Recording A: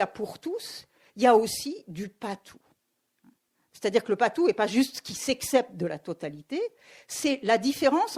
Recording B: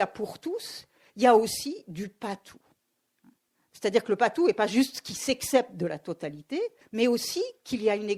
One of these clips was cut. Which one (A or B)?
B